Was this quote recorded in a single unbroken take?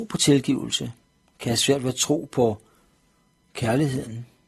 yes; 0 cuts

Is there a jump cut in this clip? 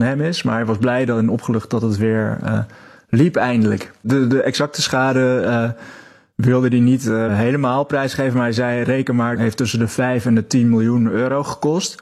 yes; 2 cuts; at 7.3 s, 9.3 s

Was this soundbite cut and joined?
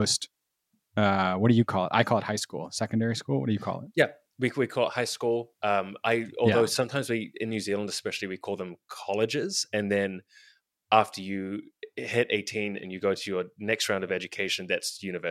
no; 0 cuts

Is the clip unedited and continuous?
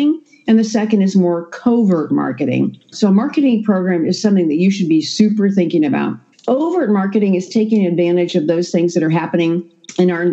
no; 2 cuts; at 2.9 s, 6.3 s

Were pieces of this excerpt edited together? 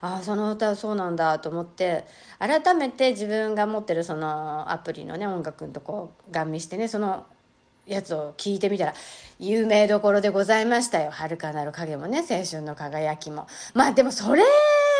no; 0 cuts

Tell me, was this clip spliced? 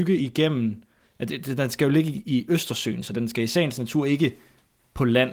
no; 0 cuts

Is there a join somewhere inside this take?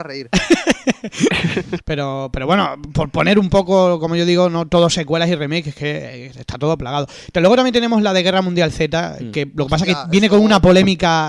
yes; 1 cut; at 1.8 s

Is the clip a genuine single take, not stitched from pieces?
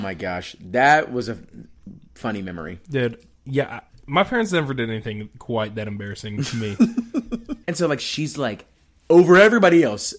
no; 2 cuts; at 3.9 s, 7.6 s

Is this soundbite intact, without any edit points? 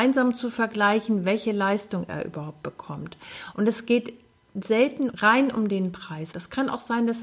no; 3 cuts; at 3.5 s, 5.1 s, 6.3 s

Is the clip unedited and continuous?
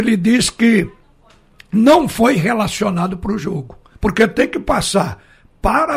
no; 1 cut; at 3.9 s

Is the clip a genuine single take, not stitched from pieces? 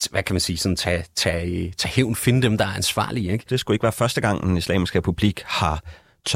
no; 1 cut; at 3.5 s

